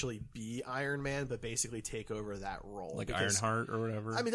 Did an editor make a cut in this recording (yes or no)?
no